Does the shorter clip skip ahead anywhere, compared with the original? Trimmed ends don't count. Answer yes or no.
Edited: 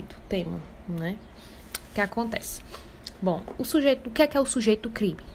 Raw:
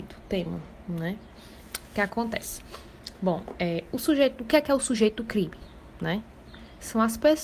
yes